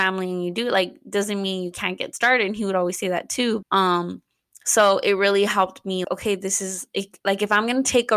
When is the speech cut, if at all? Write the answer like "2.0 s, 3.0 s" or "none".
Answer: 3.6 s, 6.0 s

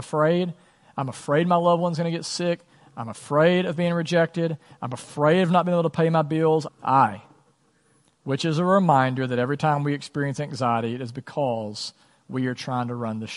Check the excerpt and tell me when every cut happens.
6.7 s

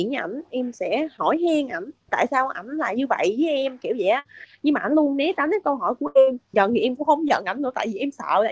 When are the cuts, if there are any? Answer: 6.5 s

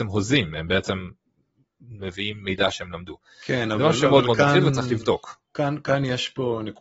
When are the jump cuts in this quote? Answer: none

